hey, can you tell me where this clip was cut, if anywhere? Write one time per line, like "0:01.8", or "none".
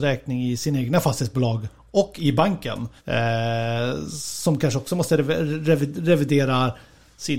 0:03.0